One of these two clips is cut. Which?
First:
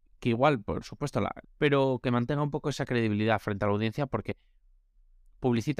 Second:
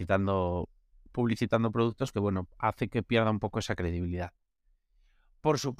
first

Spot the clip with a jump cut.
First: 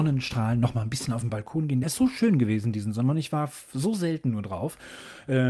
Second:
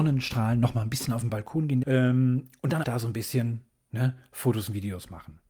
second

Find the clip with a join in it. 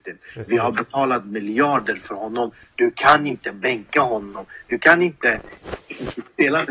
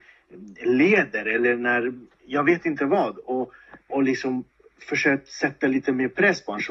second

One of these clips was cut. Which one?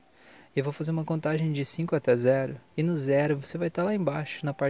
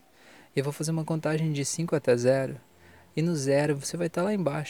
first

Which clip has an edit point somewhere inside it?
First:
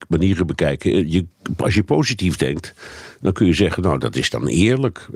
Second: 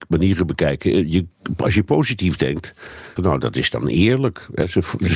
second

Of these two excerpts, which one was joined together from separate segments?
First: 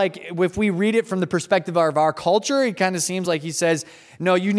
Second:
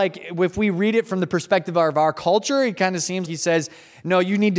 second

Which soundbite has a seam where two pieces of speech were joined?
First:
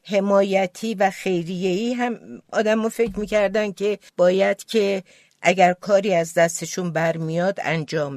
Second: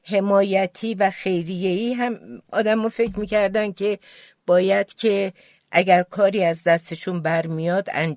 first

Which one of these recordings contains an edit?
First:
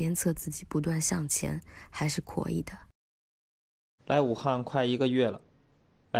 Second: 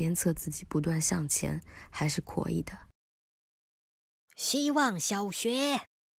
first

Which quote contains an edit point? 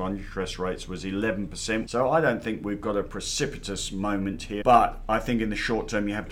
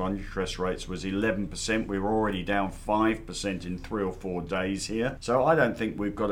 first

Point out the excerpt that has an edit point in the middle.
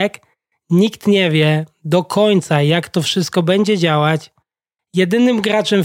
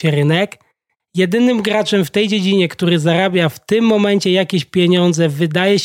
second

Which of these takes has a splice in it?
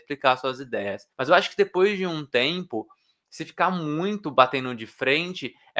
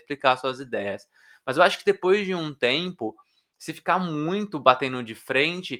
first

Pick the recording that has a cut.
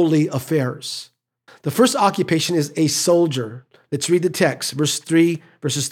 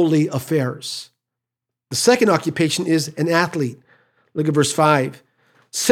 first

